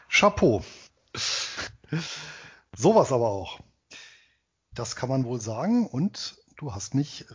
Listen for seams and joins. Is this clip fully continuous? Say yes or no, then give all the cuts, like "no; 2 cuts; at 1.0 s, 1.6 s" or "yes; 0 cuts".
no; 2 cuts; at 1.6 s, 4.7 s